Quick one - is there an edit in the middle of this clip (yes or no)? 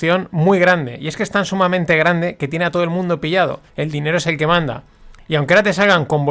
yes